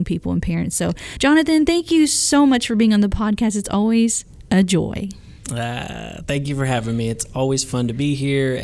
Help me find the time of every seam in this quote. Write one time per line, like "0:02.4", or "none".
none